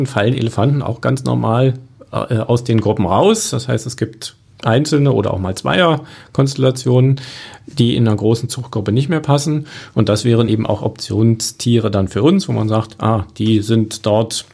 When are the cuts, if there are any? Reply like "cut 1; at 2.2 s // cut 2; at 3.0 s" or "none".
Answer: none